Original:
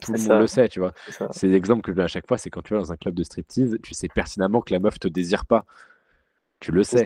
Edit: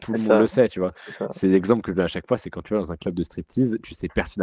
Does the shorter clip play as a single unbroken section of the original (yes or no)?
yes